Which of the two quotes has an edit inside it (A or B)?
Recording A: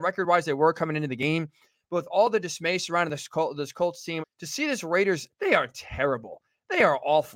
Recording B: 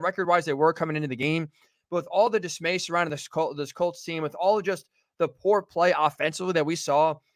A